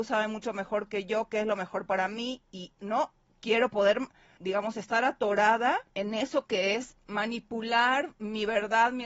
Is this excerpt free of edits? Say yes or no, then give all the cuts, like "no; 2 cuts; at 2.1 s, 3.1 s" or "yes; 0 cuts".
no; 2 cuts; at 4.4 s, 5.9 s